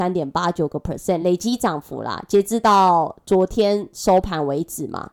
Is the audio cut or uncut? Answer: uncut